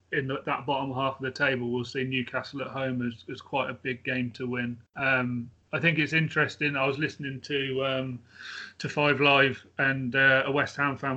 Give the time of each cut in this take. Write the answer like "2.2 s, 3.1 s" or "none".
4.9 s